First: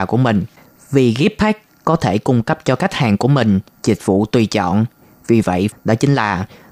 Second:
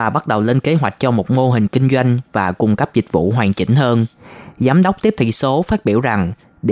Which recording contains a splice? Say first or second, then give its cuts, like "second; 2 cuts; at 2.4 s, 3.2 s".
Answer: first; 1 cut; at 5.7 s